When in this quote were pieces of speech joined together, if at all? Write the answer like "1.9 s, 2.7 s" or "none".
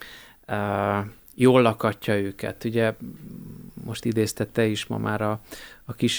none

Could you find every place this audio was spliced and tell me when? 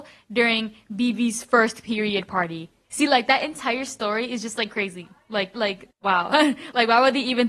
5.5 s

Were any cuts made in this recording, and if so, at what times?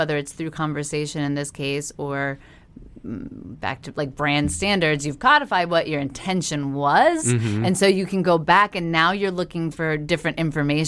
none

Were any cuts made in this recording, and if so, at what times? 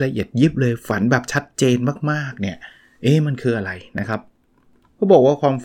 none

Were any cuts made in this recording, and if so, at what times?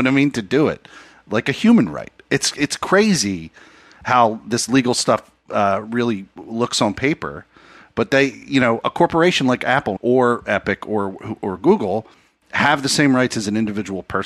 10.0 s

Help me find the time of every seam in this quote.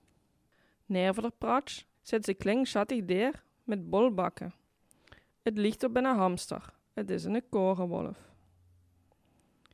1.9 s, 6.9 s

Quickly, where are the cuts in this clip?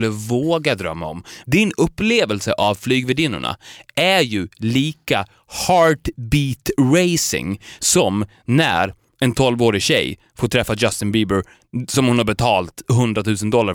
1.4 s

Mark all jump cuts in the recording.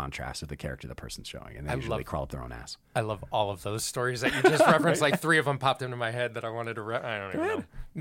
none

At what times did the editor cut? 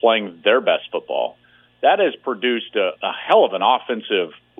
1.6 s, 3.0 s

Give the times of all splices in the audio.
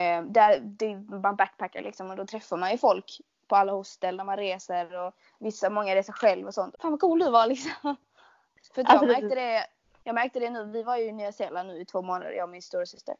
6.7 s

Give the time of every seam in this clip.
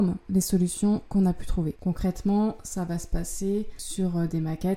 1.8 s

